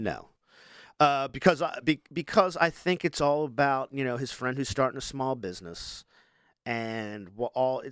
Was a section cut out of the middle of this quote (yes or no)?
no